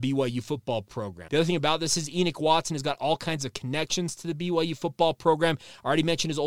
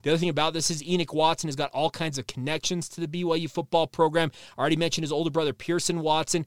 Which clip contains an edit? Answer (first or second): first